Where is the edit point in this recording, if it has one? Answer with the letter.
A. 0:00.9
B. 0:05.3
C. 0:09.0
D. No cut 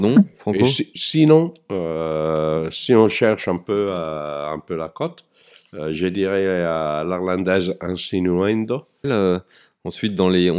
C